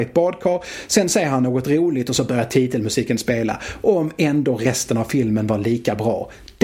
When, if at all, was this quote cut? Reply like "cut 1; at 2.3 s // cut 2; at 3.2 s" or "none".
none

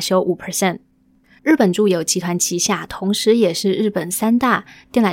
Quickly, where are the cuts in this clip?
cut 1; at 1.4 s

